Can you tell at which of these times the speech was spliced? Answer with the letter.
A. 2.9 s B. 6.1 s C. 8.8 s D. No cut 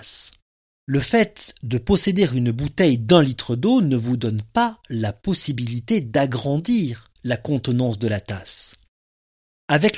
D